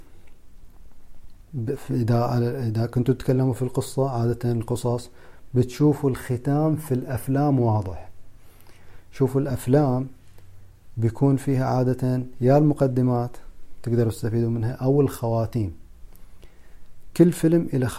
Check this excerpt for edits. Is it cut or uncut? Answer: uncut